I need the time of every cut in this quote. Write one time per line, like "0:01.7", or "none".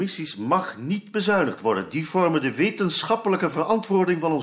none